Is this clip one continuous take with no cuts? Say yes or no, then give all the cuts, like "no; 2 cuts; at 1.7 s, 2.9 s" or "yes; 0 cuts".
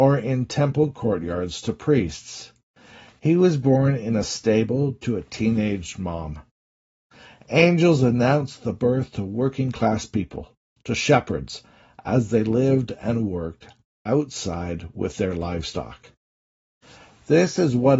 yes; 0 cuts